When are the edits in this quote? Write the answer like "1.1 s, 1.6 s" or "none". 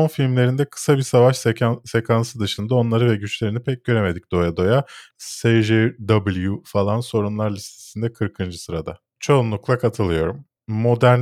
5.1 s